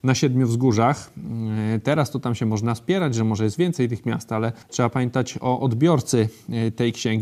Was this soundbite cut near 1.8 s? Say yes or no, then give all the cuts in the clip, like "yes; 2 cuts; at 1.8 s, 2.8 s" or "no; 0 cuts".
no; 1 cut; at 4.6 s